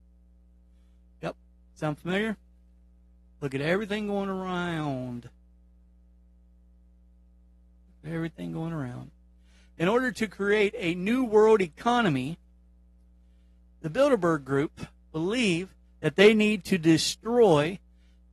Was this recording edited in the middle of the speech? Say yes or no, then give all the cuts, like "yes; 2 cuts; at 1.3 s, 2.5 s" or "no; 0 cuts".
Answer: no; 0 cuts